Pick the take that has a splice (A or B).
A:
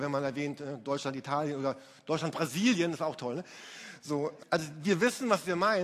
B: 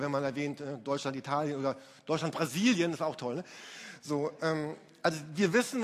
A